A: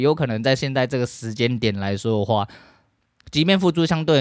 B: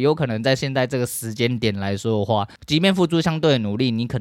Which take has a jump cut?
B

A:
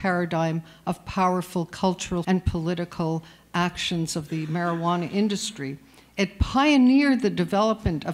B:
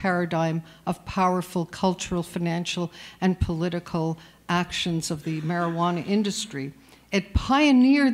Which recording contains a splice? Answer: A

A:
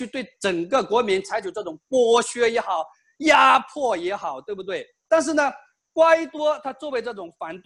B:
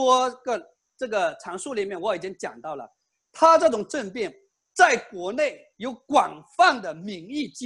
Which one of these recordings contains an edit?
A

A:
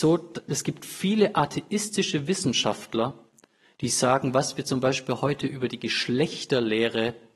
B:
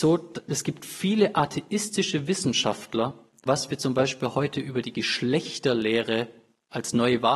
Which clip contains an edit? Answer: B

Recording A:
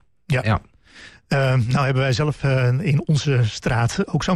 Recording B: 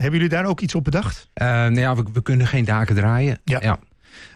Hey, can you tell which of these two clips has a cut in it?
B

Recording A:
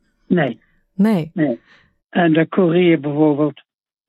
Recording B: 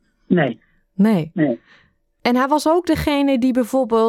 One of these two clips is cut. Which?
A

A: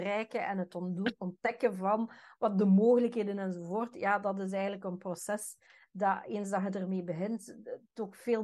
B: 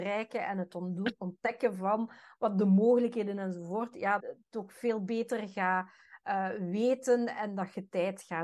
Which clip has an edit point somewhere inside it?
B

